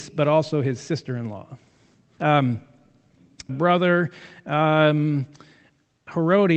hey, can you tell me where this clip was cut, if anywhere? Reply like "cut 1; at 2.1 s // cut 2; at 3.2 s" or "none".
cut 1; at 2.2 s // cut 2; at 3.5 s